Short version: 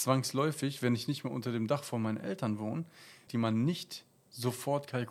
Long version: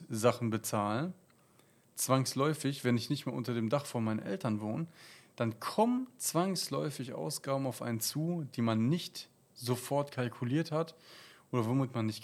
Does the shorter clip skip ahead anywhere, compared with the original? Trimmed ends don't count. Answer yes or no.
yes